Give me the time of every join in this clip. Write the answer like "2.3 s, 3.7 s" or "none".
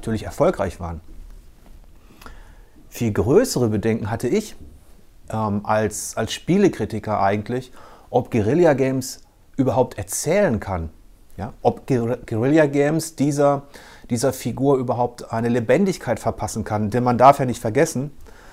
none